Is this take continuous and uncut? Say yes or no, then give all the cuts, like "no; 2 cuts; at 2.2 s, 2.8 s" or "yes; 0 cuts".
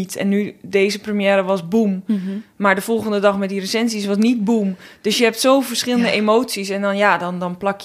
yes; 0 cuts